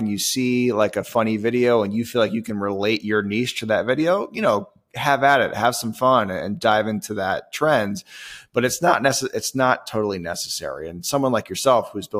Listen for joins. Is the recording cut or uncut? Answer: uncut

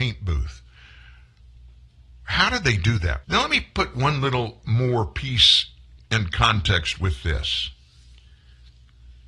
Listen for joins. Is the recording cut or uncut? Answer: cut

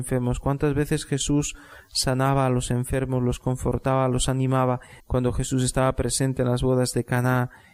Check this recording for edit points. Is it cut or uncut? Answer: cut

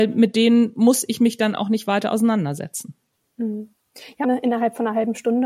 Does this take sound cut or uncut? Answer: cut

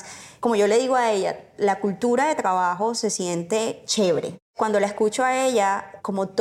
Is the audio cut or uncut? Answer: uncut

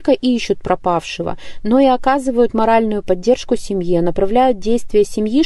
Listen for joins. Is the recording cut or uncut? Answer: uncut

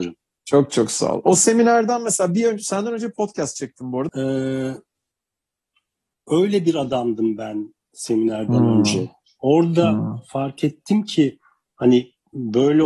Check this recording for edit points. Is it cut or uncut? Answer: cut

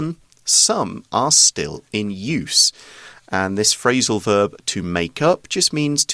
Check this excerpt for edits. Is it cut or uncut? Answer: uncut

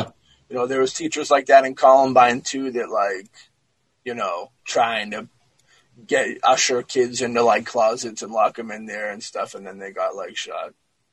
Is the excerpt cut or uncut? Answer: cut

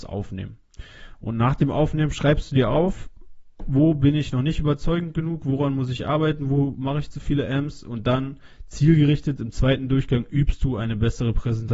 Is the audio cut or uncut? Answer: uncut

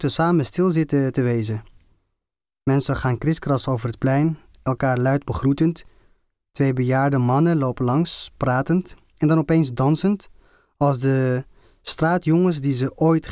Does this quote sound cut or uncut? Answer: uncut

